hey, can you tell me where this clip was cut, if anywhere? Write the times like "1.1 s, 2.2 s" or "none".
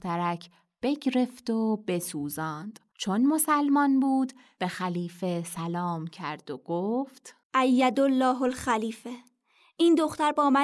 2.9 s, 7.4 s

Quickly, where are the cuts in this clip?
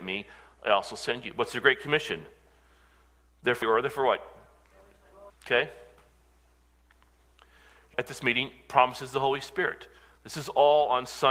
3.6 s, 5.3 s, 7.9 s

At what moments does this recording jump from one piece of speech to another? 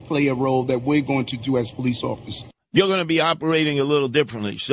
none

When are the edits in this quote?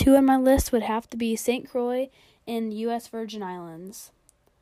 none

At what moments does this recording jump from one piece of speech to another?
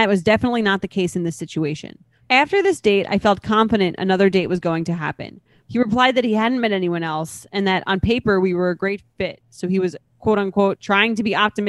2.2 s, 5.6 s

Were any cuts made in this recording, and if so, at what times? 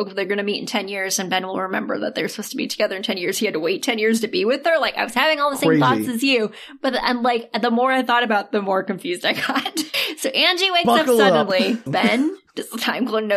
9.9 s, 11.9 s

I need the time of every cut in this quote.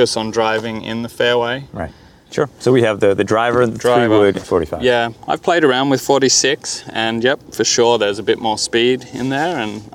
2.3 s, 4.4 s

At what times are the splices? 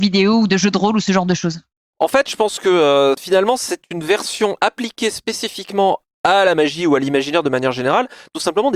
none

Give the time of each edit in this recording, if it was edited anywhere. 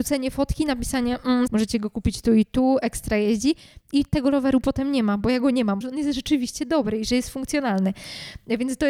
1.5 s, 5.8 s

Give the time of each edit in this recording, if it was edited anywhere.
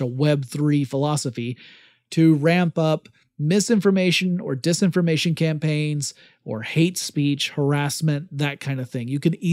none

